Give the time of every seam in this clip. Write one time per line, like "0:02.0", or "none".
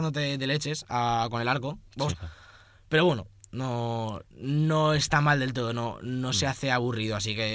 0:02.1

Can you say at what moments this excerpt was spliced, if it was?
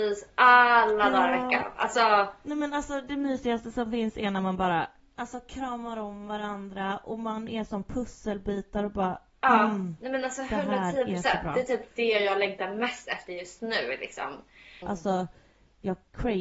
0:14.8

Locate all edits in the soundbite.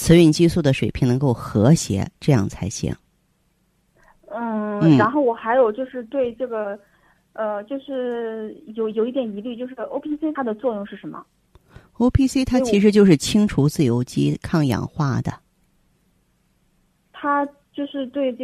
none

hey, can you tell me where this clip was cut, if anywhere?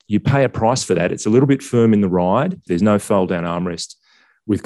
0:02.7

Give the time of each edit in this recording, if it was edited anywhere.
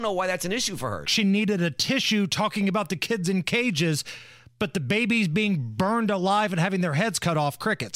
0:01.0

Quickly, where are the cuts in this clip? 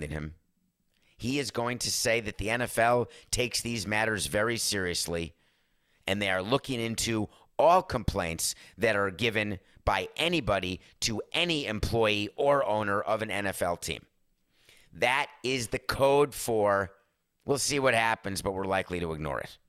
0:17.4

